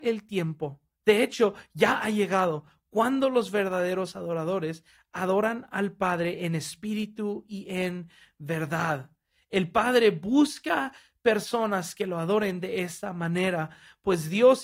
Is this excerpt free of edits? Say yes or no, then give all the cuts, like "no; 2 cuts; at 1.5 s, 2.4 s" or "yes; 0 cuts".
yes; 0 cuts